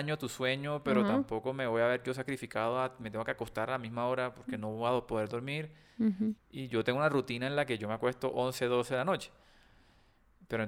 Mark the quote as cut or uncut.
cut